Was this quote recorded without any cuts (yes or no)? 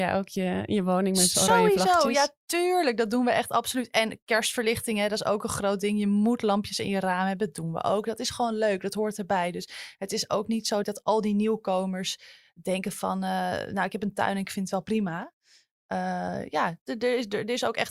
yes